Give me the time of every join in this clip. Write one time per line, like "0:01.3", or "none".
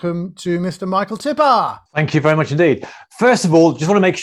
0:01.9